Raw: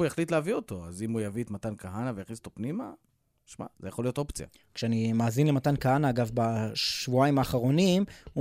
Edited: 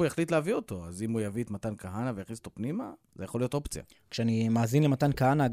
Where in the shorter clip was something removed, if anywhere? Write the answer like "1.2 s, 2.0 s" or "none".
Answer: 3.1 s